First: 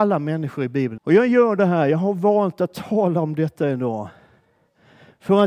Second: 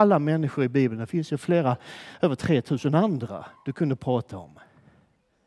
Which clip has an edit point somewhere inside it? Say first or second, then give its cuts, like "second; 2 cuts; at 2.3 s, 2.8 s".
first; 1 cut; at 1.0 s